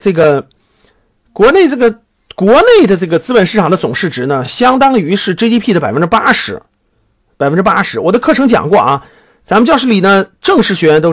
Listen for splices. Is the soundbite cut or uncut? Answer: uncut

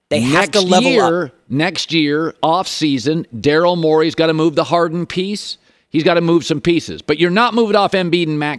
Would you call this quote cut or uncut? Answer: uncut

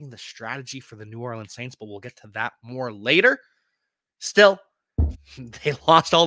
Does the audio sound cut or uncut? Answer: cut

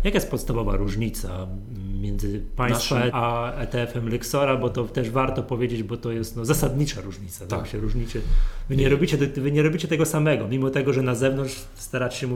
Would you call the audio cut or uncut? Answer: cut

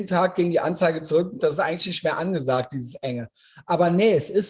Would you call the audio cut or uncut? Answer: cut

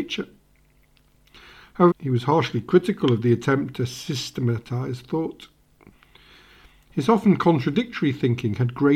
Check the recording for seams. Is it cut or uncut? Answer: cut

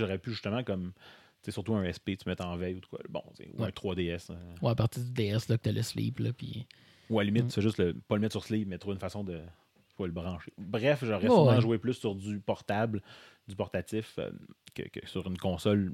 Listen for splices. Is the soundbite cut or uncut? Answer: uncut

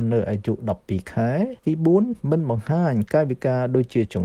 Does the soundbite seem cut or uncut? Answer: cut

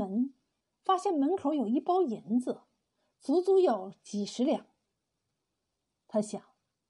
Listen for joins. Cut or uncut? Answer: cut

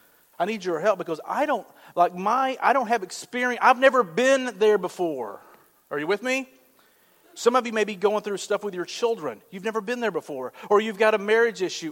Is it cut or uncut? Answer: uncut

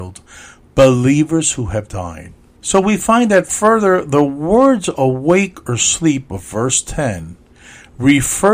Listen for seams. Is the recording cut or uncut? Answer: cut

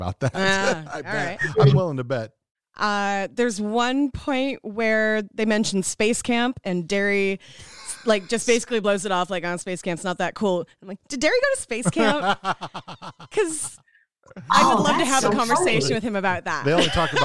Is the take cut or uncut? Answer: uncut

